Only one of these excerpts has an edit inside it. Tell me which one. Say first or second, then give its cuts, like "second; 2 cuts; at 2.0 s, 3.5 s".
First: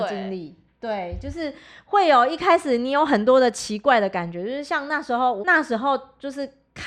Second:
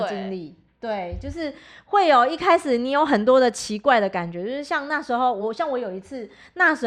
first; 1 cut; at 5.4 s